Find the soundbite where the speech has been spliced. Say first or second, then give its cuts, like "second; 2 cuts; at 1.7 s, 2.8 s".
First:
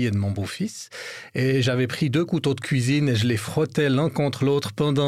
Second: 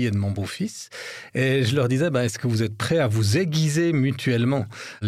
second; 1 cut; at 1.3 s